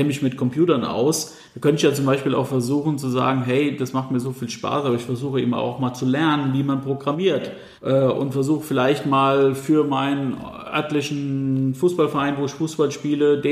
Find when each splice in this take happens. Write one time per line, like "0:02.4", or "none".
0:07.8